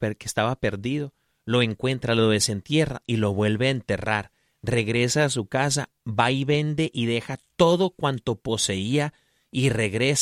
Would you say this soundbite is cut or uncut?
uncut